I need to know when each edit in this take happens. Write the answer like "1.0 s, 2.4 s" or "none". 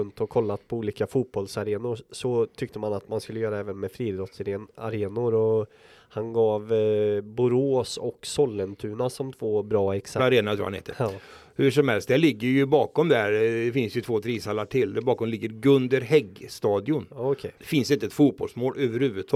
10.2 s, 17.6 s